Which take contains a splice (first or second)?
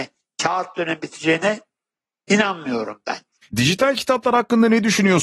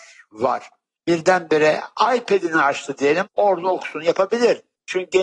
first